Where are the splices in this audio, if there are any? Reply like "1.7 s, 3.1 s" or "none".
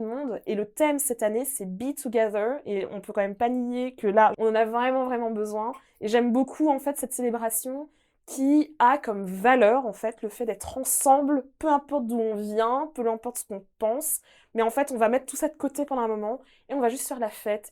4.3 s